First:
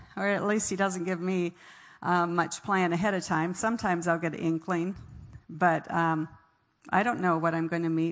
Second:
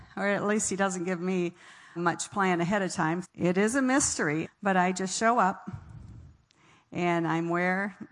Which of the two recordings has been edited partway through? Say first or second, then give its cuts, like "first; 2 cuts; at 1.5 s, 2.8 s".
second; 3 cuts; at 2.0 s, 3.2 s, 4.4 s